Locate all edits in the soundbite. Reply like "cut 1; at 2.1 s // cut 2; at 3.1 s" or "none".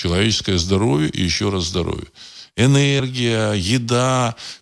none